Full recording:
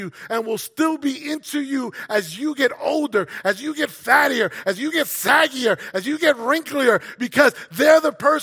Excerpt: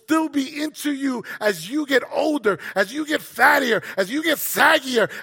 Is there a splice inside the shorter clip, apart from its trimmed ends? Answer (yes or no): no